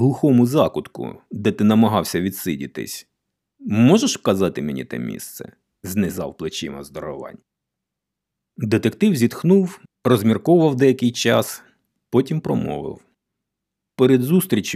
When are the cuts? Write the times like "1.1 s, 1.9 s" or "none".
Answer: 5.7 s

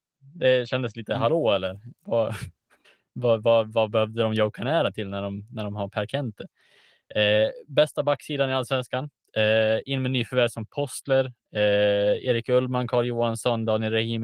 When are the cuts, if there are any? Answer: none

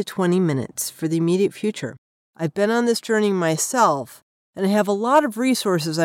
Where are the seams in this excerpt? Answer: 2.2 s

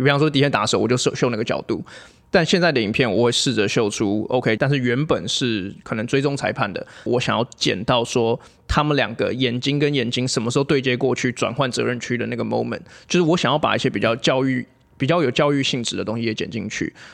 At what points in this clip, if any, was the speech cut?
4.6 s, 7.1 s

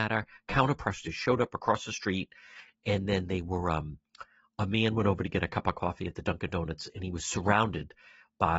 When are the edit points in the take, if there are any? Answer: none

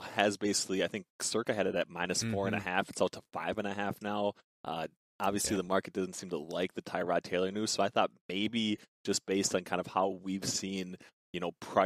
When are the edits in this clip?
none

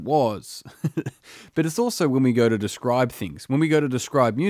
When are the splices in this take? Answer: none

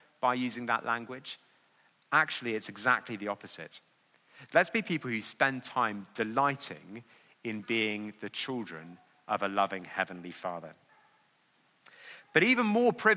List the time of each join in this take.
4.5 s

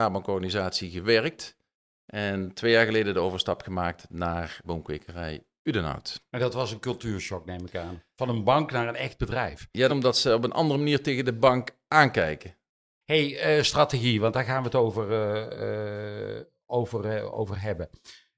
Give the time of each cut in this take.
4.6 s, 9.9 s, 13.0 s

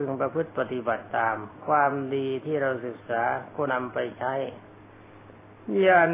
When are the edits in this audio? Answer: 3.7 s

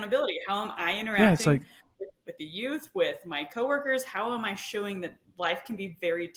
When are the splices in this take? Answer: 2.1 s

